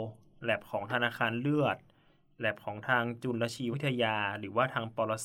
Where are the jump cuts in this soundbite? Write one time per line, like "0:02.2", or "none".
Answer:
0:03.7